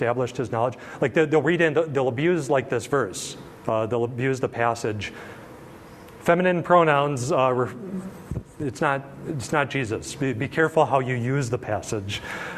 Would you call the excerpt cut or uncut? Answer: uncut